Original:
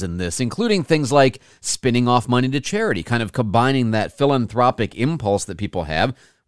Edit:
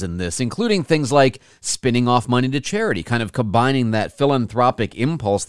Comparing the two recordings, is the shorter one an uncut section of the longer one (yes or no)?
yes